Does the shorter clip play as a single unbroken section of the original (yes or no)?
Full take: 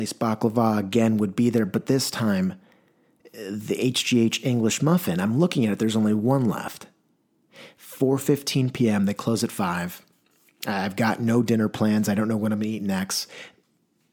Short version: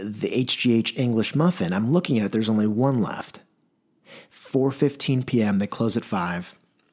yes